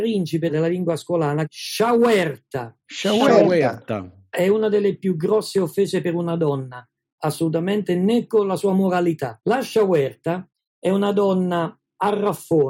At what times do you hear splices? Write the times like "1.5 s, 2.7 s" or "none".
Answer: 7.1 s, 9.4 s